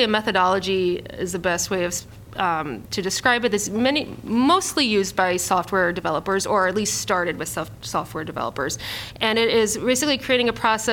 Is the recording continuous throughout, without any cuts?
yes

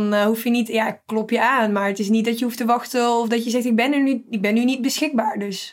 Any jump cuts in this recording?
no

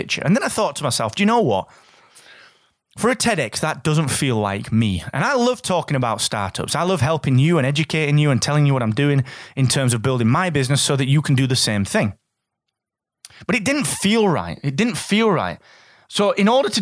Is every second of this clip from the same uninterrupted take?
yes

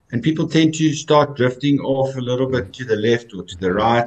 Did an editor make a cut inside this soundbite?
yes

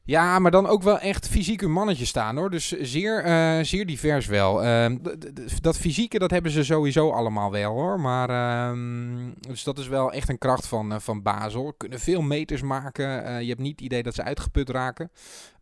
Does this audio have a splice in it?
yes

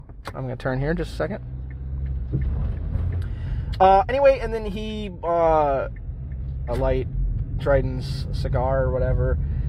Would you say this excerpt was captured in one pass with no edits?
no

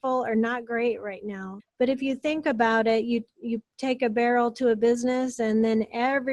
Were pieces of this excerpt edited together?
yes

